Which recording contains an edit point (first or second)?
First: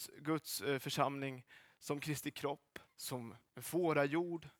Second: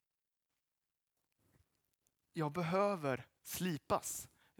first